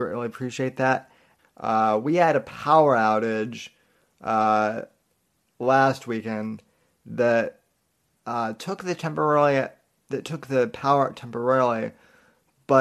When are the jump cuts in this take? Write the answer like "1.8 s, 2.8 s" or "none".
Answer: 1.4 s